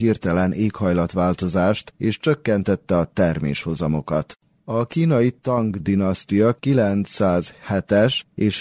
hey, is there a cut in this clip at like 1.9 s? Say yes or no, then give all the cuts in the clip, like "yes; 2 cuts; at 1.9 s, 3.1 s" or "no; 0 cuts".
yes; 1 cut; at 1.9 s